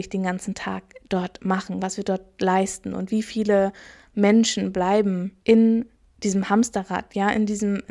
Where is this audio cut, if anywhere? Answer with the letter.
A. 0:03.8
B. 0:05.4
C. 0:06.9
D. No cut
B